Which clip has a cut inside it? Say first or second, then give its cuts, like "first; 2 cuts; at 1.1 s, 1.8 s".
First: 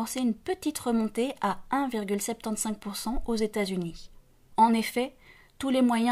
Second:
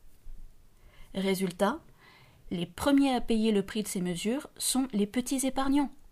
first; 1 cut; at 4.5 s